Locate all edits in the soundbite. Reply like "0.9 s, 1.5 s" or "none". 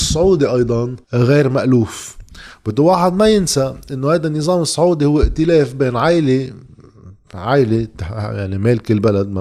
1.0 s

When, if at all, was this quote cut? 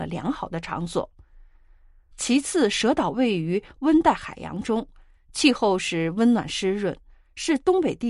none

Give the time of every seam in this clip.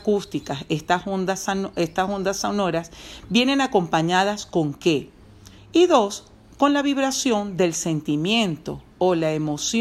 5.6 s

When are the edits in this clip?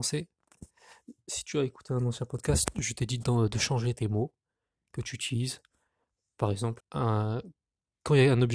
6.8 s

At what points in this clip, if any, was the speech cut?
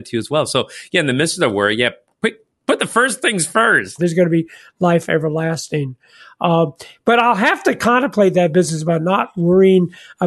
4.0 s

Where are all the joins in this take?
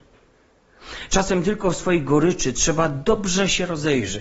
none

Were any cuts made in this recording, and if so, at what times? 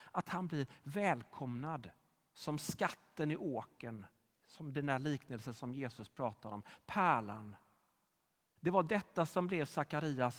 8.6 s

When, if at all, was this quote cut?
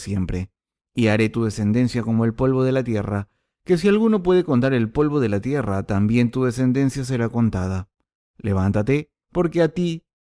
9.2 s

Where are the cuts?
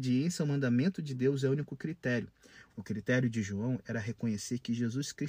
2.7 s

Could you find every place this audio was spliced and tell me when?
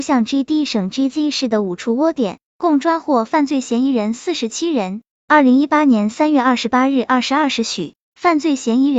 none

